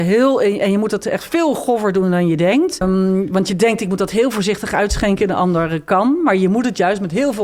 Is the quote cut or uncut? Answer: cut